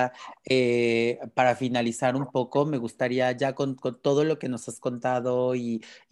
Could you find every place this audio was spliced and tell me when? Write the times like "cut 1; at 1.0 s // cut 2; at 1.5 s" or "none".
none